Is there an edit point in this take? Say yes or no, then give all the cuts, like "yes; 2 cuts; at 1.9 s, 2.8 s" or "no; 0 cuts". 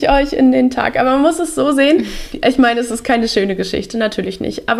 no; 0 cuts